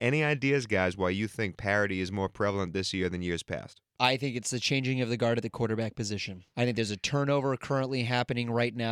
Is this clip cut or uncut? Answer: cut